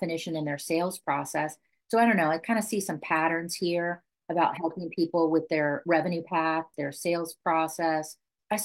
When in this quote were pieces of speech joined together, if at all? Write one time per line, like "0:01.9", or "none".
0:06.7